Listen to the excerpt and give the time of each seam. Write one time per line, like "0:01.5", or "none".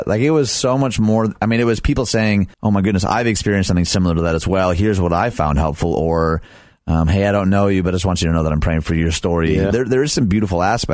0:02.5
0:09.7